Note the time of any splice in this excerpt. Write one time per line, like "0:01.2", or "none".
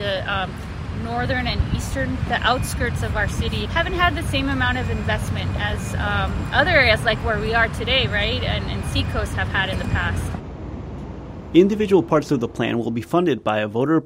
0:03.7